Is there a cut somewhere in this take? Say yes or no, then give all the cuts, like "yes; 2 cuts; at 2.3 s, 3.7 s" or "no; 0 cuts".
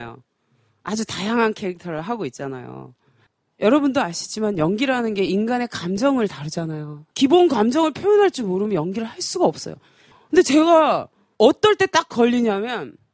yes; 1 cut; at 3.5 s